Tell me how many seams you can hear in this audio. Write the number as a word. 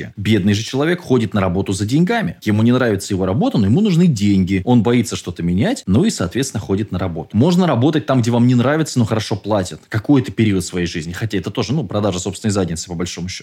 one